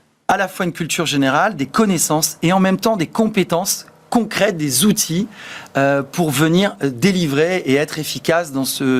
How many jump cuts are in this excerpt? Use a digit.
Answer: 0